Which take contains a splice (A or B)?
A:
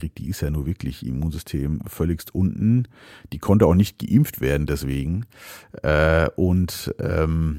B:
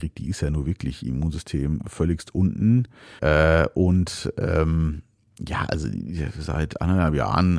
B